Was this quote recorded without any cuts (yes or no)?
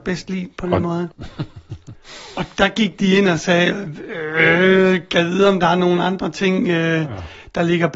no